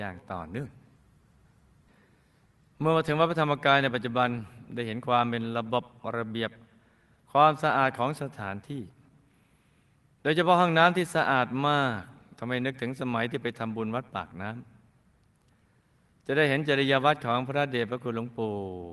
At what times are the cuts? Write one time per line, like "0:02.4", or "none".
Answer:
none